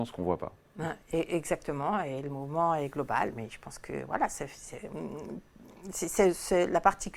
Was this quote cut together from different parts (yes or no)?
no